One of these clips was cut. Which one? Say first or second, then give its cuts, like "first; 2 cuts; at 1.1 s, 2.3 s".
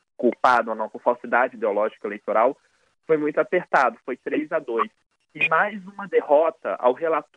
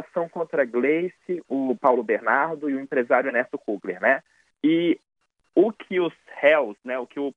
second; 1 cut; at 4.5 s